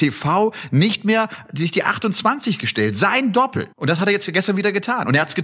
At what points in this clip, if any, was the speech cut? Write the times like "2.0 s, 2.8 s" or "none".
3.7 s